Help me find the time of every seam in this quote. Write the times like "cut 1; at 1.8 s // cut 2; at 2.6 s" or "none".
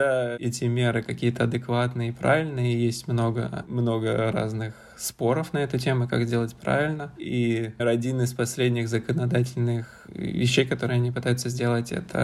cut 1; at 7.8 s